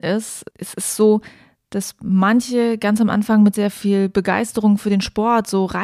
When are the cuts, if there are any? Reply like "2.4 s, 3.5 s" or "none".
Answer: none